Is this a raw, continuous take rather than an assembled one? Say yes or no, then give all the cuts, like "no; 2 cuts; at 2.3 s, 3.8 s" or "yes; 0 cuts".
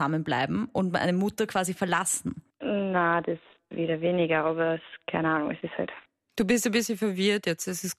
yes; 0 cuts